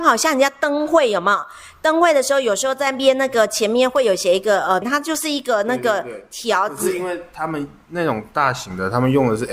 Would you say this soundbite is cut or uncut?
cut